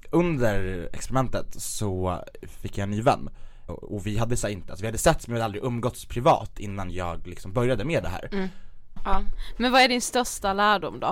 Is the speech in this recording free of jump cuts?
no; 2 cuts; at 3.7 s, 9.0 s

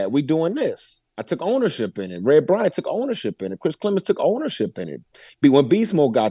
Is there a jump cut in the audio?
no; 0 cuts

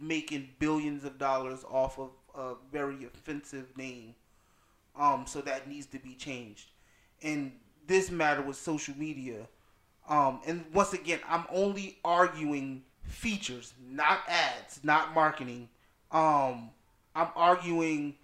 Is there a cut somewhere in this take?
yes; 1 cut; at 12.9 s

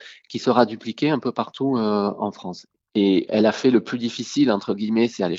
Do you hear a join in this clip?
yes; 1 cut; at 2.9 s

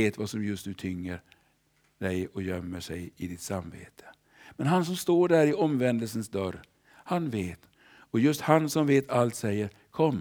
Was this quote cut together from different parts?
yes; 1 cut; at 7.7 s

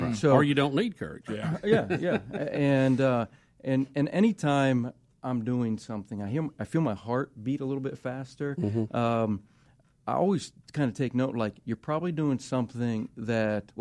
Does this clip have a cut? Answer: no; 0 cuts

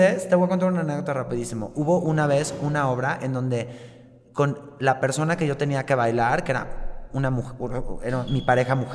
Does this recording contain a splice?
no; 0 cuts

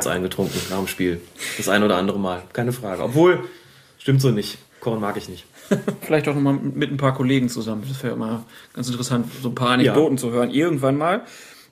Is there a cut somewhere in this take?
yes; 1 cut; at 6.0 s

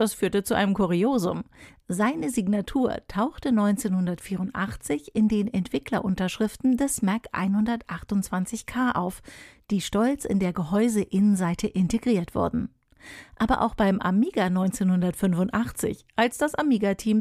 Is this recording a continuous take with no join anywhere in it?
yes; 0 cuts

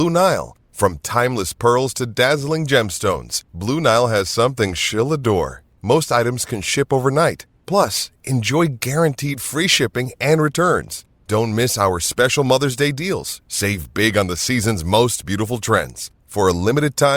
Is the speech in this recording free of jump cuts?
no; 1 cut; at 5.8 s

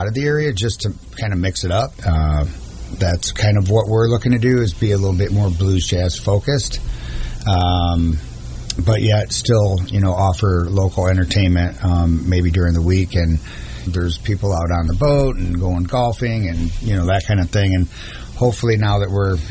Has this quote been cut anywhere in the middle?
yes; 2 cuts; at 2.0 s, 13.9 s

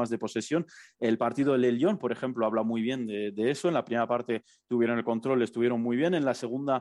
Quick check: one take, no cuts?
yes; 0 cuts

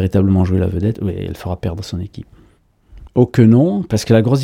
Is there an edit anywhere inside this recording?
yes; 2 cuts; at 0.9 s, 3.1 s

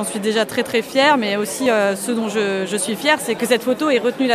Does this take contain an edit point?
no; 0 cuts

